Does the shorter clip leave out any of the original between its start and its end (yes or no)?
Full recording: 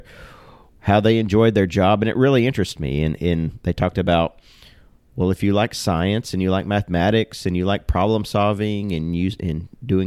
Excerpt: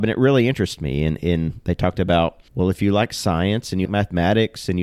yes